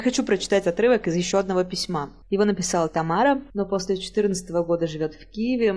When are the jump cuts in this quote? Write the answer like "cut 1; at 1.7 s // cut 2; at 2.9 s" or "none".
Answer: cut 1; at 2.2 s // cut 2; at 3.5 s